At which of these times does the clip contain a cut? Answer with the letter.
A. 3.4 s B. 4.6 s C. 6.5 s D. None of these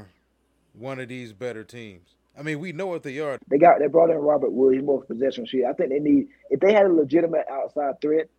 A